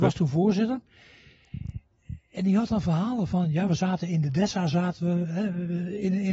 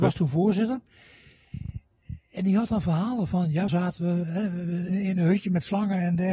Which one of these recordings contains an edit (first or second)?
second